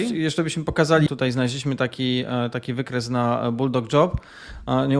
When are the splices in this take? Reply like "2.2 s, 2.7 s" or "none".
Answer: 1.1 s

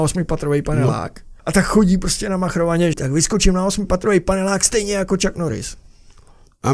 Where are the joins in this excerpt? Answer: 1.4 s, 2.9 s

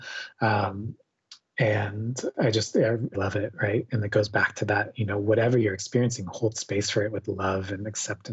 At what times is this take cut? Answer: 3.1 s

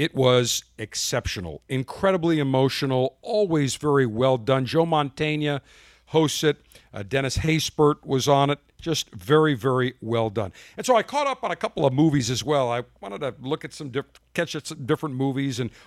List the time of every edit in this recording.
none

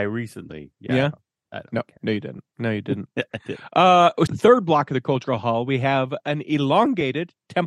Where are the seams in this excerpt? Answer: 4.3 s

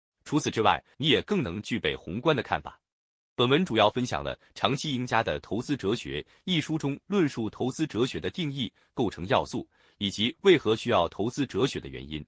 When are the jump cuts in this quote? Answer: 0.9 s, 3.3 s

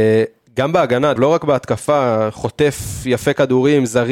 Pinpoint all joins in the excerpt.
1.2 s

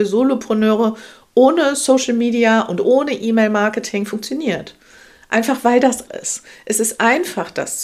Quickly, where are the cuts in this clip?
6.1 s

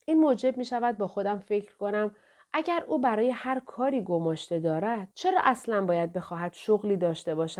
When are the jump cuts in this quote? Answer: 5.1 s

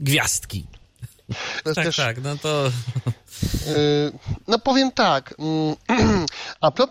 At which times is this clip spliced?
1.6 s

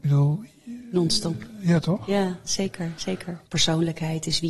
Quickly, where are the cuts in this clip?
3.4 s

